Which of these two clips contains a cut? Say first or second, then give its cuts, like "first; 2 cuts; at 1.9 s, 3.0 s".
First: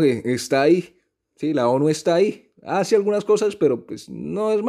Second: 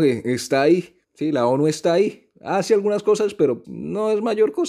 second; 2 cuts; at 1.0 s, 3.6 s